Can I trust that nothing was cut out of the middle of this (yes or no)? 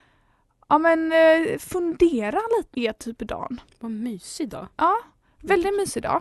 no